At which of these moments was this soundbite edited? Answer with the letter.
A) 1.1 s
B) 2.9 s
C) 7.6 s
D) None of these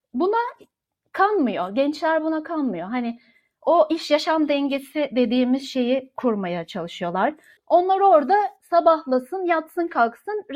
C